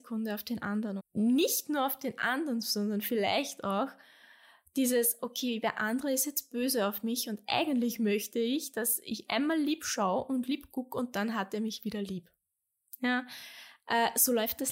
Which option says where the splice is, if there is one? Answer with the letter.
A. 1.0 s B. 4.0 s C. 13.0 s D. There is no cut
A